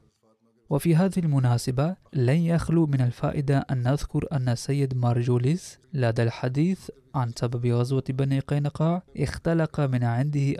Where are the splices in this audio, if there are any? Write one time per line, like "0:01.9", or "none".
0:02.1
0:05.8
0:09.1

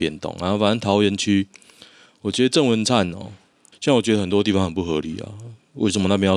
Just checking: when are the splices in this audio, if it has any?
0:03.7

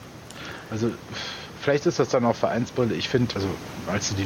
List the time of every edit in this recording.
0:03.4

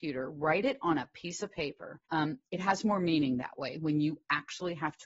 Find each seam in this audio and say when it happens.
0:02.0

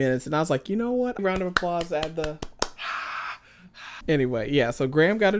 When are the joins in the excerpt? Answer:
0:01.2
0:04.0

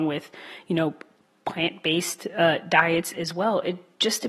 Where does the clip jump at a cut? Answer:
none

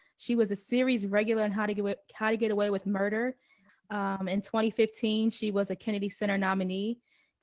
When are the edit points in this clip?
0:03.7

